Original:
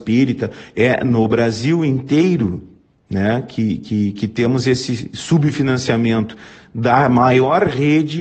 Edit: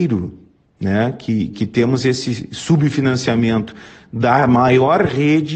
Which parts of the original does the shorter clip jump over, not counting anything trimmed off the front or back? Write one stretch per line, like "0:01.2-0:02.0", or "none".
0:03.8-0:04.1